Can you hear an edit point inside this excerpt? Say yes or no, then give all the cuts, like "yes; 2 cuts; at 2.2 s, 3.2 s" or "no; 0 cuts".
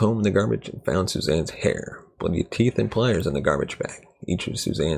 no; 0 cuts